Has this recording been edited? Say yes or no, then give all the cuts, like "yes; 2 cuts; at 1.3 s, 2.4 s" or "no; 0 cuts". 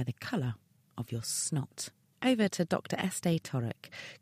no; 0 cuts